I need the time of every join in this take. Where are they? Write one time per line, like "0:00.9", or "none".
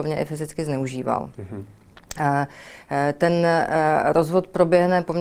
none